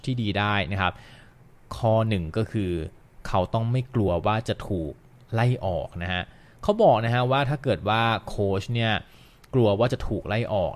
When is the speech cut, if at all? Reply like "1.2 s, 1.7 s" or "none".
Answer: none